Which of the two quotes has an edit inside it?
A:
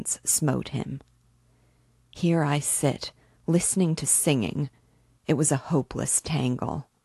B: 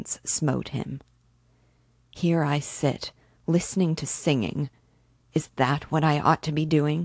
A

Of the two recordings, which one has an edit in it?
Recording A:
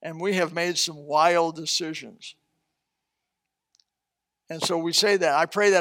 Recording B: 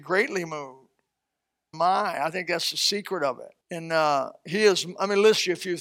B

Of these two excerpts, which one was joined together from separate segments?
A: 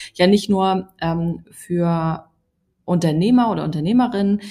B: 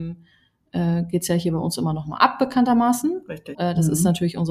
B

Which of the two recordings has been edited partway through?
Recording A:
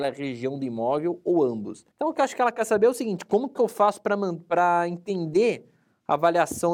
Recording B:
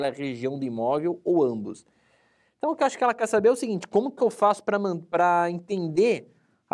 A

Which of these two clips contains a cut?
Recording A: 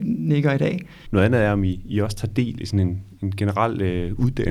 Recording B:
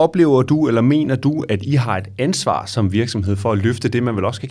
A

